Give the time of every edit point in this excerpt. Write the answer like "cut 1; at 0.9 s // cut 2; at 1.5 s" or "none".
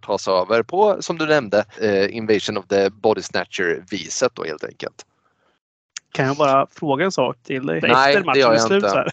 cut 1; at 1.7 s // cut 2; at 7.8 s